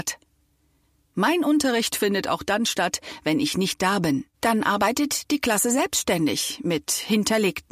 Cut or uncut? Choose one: cut